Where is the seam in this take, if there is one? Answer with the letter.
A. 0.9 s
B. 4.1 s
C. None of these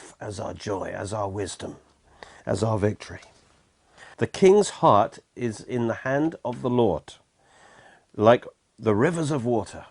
B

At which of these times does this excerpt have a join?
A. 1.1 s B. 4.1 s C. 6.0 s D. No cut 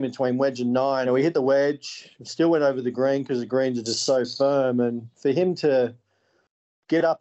A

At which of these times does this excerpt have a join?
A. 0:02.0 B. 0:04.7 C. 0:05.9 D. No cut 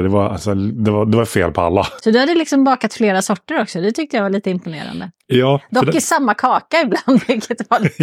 A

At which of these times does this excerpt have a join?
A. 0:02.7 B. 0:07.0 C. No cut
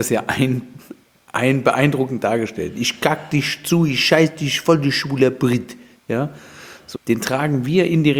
B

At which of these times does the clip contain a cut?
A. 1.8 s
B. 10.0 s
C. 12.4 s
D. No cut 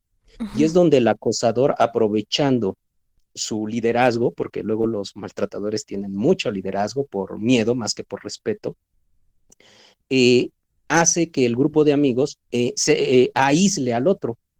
C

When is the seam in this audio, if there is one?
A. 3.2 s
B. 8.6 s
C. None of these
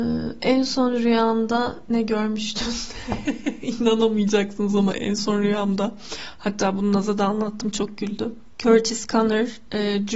C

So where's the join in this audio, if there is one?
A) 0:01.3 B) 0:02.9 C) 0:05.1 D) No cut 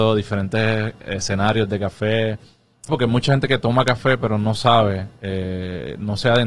B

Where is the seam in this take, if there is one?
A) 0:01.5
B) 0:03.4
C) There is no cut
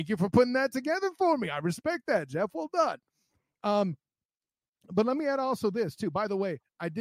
C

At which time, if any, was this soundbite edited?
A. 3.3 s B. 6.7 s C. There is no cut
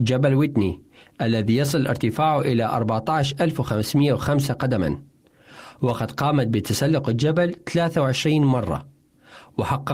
C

